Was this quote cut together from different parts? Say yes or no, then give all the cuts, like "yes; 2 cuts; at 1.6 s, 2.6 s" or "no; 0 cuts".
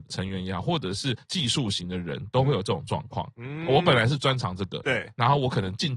no; 0 cuts